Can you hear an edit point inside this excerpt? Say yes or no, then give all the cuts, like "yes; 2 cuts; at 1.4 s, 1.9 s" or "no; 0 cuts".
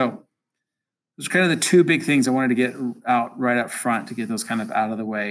no; 0 cuts